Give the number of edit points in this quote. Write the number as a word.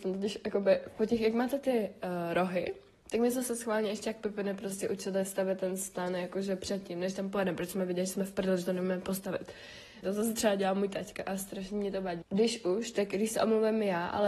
two